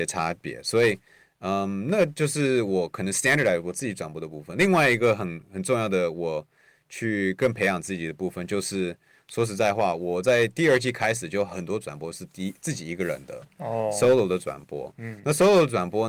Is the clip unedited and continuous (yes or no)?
yes